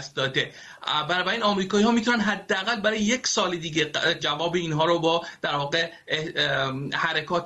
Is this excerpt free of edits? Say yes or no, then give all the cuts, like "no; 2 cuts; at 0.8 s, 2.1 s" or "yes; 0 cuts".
no; 1 cut; at 4.2 s